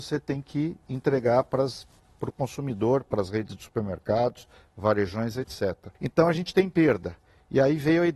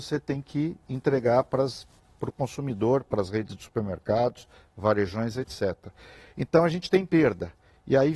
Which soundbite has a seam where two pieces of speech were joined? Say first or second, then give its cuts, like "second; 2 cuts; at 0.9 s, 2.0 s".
first; 1 cut; at 6.0 s